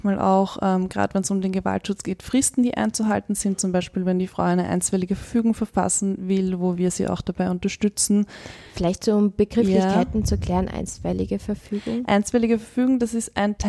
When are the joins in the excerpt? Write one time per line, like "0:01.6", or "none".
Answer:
none